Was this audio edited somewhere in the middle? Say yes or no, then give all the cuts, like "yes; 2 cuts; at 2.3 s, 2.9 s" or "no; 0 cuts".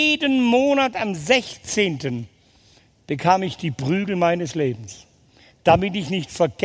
no; 0 cuts